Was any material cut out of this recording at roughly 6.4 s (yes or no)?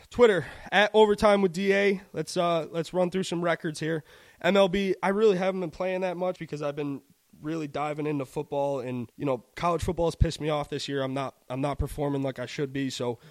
yes